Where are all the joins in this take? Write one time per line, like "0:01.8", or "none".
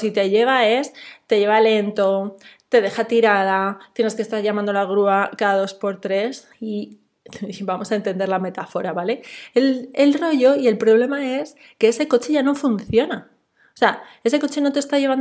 0:06.5

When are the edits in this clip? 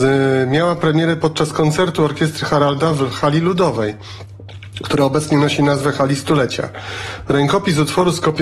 none

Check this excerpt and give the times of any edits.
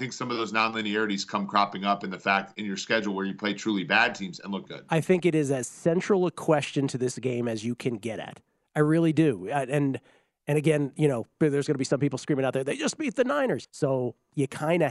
0:04.7
0:13.6

